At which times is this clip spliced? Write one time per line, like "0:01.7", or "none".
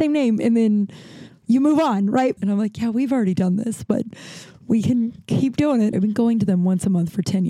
0:02.4
0:05.9